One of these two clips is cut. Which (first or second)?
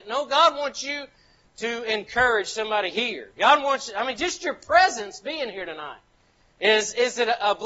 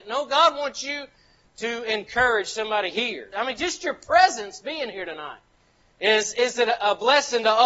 second